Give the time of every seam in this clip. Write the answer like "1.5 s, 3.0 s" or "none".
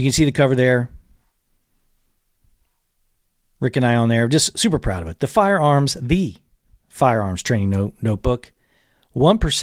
none